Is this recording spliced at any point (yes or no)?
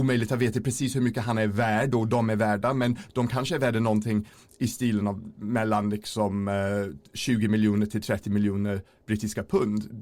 no